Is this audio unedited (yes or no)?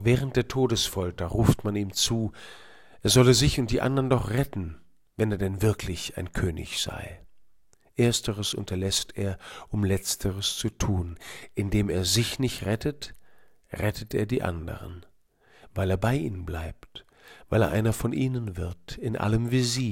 yes